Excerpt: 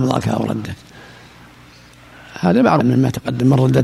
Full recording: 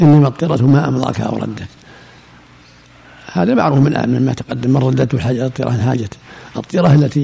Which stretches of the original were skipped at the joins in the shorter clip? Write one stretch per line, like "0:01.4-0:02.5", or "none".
0:03.7-0:04.0